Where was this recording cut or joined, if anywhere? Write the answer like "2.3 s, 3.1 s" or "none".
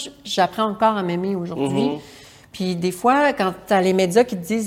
none